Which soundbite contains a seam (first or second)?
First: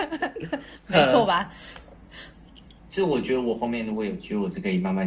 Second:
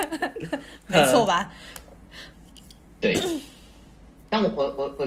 first